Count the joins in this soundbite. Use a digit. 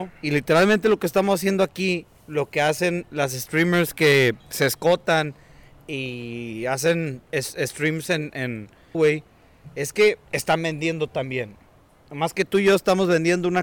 3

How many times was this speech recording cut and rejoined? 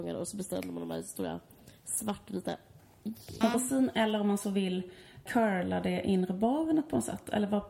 2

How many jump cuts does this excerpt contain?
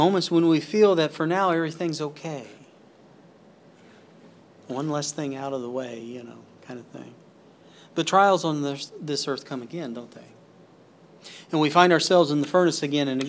0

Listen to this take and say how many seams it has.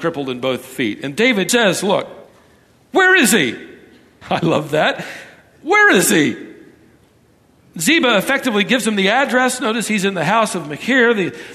1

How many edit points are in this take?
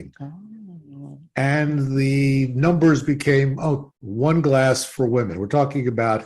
1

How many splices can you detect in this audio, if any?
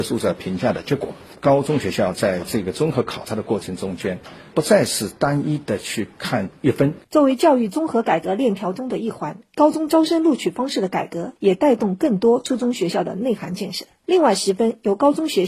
2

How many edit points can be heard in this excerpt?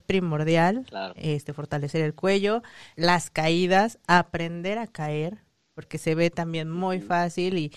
1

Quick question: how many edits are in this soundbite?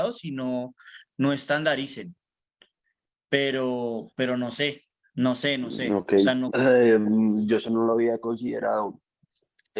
1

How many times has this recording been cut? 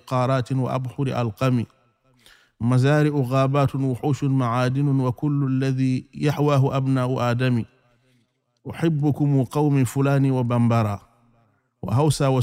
0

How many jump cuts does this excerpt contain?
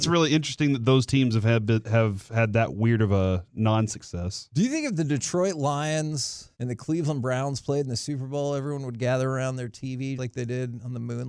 2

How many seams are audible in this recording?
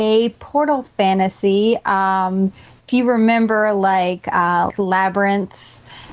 1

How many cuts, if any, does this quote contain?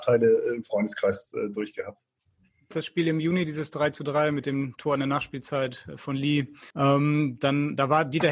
2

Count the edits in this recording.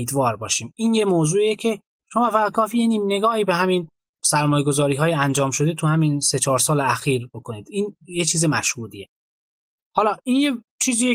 0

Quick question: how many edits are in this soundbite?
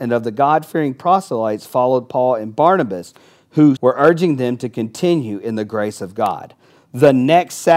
1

